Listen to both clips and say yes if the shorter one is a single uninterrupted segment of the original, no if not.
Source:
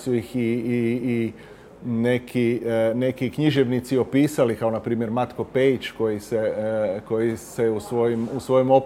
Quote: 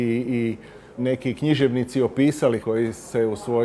no